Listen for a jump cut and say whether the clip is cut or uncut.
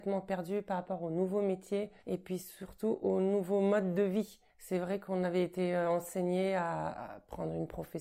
cut